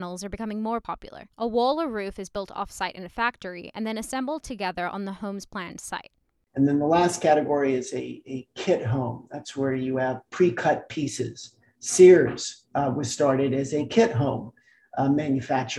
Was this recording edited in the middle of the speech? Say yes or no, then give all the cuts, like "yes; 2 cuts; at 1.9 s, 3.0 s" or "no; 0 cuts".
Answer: yes; 1 cut; at 1.3 s